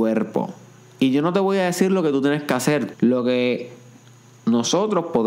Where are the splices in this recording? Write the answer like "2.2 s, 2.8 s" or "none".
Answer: 2.9 s